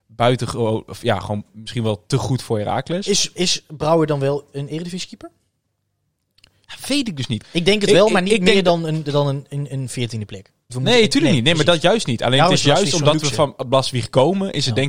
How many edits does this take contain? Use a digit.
2